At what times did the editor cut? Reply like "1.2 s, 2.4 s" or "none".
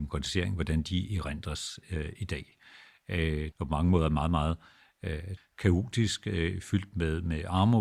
3.5 s, 5.4 s